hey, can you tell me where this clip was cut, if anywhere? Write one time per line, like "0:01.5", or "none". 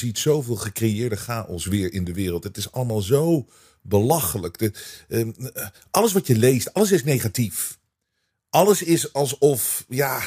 none